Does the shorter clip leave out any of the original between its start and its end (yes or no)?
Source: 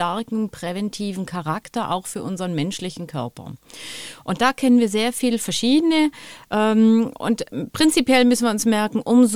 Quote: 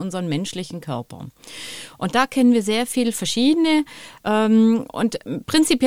no